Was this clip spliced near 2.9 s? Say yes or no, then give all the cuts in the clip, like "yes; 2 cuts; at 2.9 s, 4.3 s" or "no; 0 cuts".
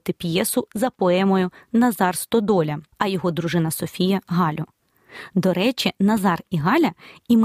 yes; 1 cut; at 2.9 s